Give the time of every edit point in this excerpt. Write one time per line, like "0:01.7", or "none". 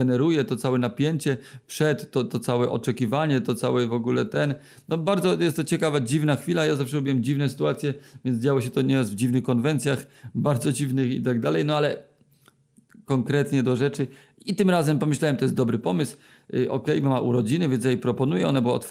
none